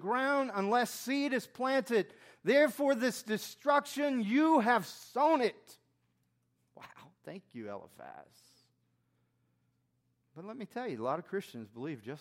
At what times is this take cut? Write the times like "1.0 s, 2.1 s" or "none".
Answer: none